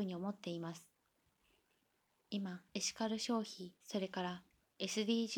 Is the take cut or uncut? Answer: cut